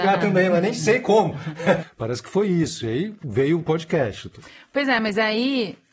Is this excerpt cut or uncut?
cut